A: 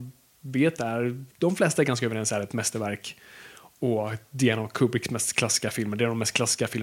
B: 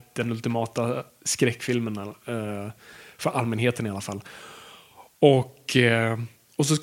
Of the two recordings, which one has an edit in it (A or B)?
A